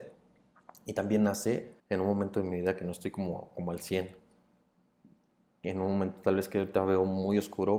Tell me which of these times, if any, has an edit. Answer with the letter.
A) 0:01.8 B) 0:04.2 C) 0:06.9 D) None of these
A